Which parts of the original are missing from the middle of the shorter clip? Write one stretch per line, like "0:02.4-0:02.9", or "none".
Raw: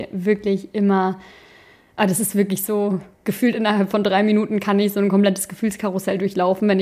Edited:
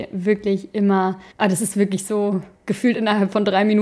0:01.3-0:01.9